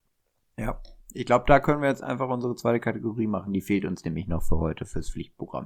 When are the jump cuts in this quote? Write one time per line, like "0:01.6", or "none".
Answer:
none